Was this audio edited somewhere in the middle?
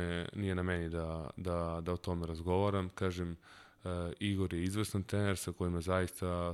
no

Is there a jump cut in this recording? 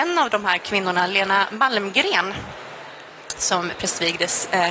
no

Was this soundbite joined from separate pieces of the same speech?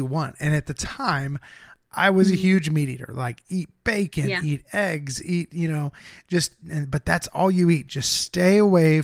no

